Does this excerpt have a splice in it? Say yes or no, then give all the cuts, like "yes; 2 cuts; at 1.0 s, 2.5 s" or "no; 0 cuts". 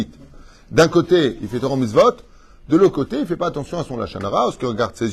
no; 0 cuts